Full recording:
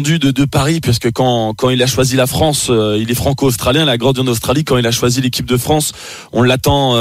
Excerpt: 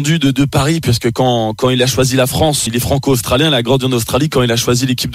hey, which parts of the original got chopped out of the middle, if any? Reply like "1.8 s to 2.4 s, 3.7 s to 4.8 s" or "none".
2.7 s to 3.0 s